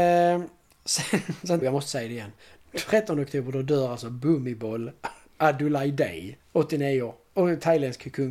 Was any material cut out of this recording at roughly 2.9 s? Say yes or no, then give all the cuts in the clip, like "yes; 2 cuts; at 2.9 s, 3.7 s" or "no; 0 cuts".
no; 2 cuts; at 1.6 s, 6.4 s